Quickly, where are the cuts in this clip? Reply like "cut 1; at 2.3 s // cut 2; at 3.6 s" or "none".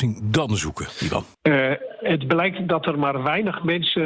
cut 1; at 1.3 s